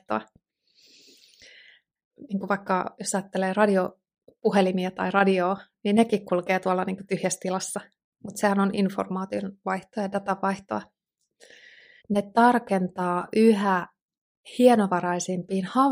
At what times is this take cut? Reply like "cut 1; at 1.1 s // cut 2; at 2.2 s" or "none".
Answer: cut 1; at 12.0 s

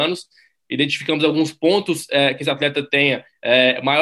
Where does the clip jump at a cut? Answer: none

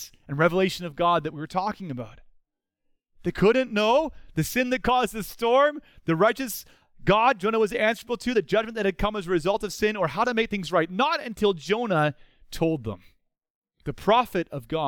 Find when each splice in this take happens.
none

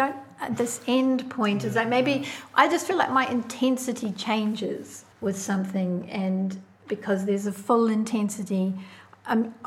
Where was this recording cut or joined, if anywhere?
cut 1; at 5.1 s

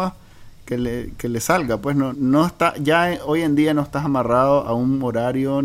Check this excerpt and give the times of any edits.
cut 1; at 2.1 s

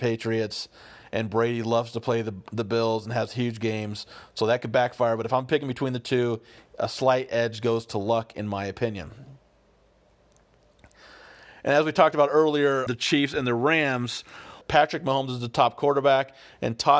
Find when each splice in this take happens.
cut 1; at 12.9 s // cut 2; at 14.6 s

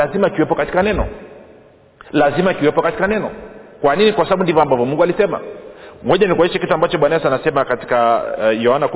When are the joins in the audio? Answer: none

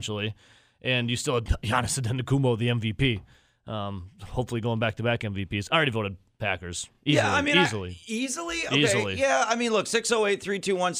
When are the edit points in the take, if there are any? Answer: none

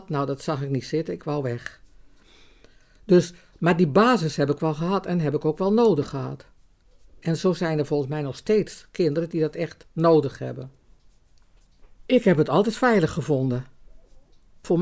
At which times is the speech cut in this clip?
none

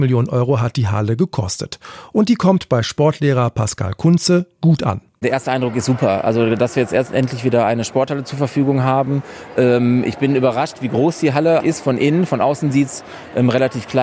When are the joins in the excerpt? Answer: cut 1; at 11.6 s

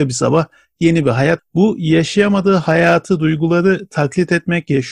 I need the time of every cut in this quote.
cut 1; at 1.4 s

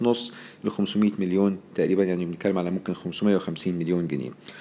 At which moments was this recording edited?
none

